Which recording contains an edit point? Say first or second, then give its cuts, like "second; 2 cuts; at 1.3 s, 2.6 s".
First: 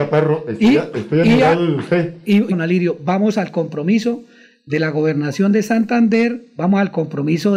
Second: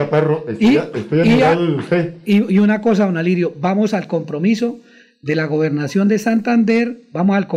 first; 1 cut; at 2.5 s